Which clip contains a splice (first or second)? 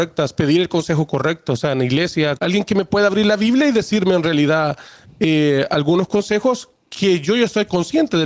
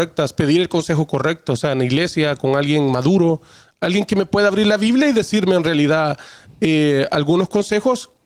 first